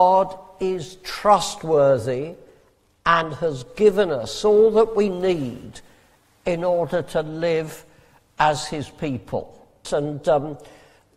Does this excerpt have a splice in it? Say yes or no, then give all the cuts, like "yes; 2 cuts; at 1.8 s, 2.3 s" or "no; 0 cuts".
yes; 1 cut; at 9.8 s